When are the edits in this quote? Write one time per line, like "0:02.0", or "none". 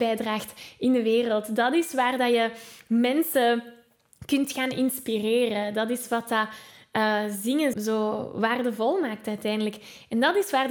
0:07.7